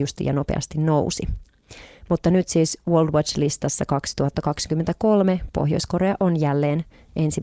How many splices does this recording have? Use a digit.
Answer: 0